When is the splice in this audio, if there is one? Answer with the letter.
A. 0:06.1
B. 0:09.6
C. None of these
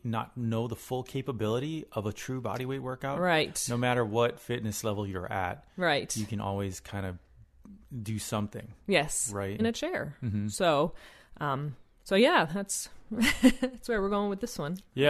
B